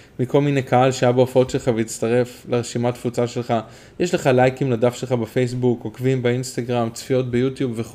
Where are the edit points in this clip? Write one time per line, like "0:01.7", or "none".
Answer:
none